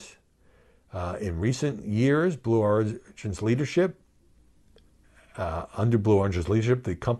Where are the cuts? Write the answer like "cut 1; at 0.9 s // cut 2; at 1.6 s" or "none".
none

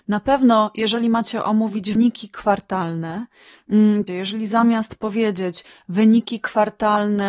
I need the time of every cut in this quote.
cut 1; at 2.0 s // cut 2; at 4.1 s

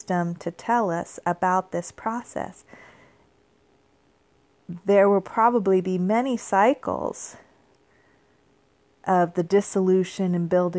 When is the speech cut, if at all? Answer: none

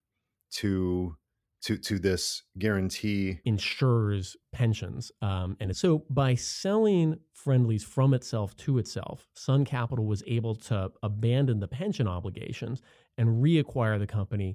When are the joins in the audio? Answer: cut 1; at 3.4 s // cut 2; at 5.7 s

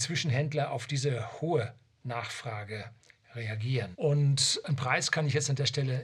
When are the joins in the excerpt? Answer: cut 1; at 3.9 s

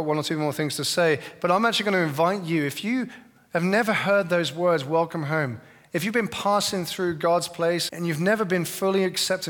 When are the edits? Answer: cut 1; at 7.9 s

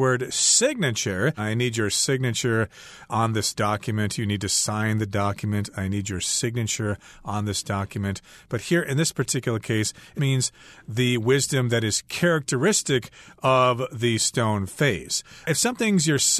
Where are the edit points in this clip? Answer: cut 1; at 1.4 s // cut 2; at 10.2 s

